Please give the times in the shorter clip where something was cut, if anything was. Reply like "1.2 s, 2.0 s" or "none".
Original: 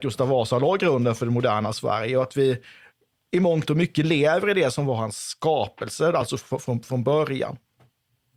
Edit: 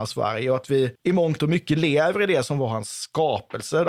1.0 s